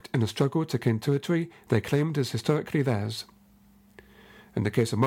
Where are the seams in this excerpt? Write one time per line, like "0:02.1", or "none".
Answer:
none